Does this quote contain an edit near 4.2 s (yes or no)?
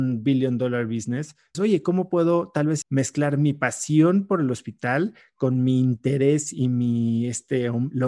no